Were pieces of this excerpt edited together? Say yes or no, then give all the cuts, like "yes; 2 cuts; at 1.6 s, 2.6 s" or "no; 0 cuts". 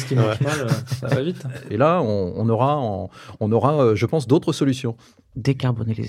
yes; 1 cut; at 1.7 s